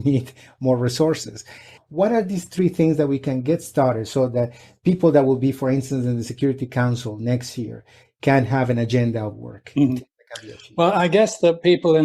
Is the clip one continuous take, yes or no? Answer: no